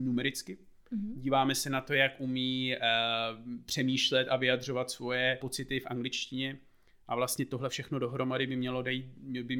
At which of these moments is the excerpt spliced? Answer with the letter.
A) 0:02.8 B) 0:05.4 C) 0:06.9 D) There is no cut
B